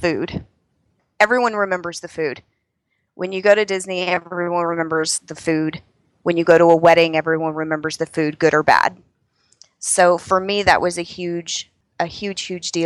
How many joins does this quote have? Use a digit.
0